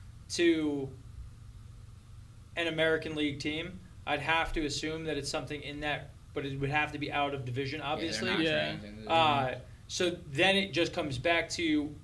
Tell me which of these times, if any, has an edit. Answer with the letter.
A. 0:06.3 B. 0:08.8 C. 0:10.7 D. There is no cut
D